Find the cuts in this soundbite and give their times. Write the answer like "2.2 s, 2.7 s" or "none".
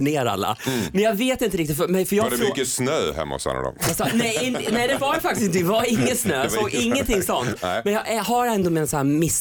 none